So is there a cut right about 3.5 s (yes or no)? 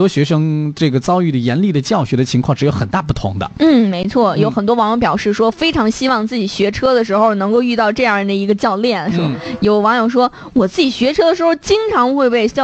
no